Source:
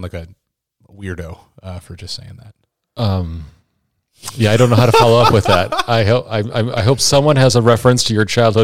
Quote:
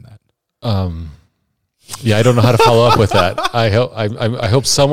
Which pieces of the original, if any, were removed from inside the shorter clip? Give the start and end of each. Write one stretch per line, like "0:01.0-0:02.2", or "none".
none